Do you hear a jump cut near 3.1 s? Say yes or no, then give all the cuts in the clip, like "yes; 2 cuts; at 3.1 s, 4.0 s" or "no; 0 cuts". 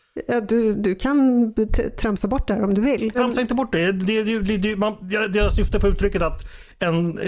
yes; 1 cut; at 3.1 s